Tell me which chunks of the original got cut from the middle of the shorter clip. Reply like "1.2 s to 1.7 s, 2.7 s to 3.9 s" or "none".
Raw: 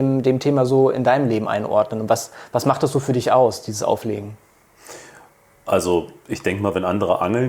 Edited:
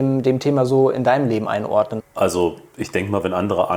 2.0 s to 5.5 s

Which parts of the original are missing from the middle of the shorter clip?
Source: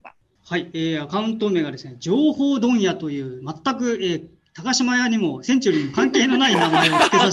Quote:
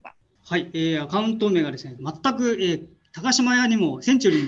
2.0 s to 3.4 s

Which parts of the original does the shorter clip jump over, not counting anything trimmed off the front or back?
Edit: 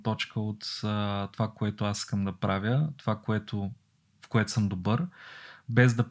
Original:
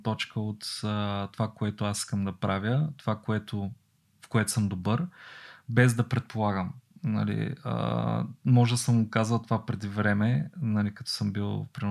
none

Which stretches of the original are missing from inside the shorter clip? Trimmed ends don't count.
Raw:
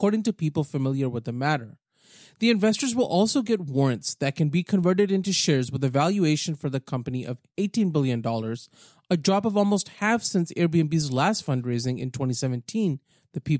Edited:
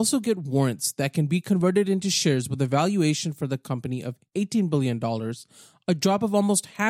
none

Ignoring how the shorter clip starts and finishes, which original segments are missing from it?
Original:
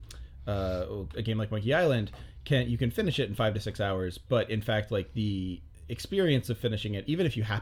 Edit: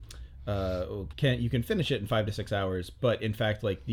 1.1 s to 2.4 s

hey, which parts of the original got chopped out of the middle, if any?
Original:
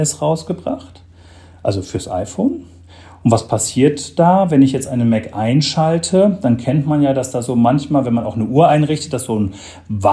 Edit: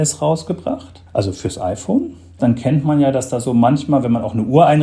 1.1 s to 1.6 s, 2.9 s to 6.4 s

